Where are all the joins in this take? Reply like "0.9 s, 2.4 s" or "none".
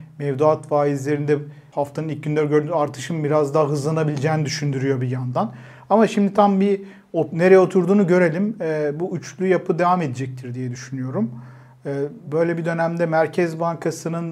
12.3 s